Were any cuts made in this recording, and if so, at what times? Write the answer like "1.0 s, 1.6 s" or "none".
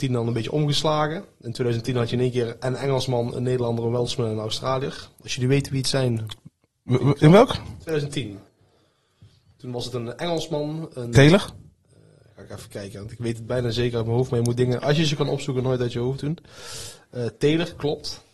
none